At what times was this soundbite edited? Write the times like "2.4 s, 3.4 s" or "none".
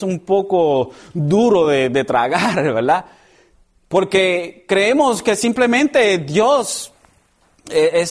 none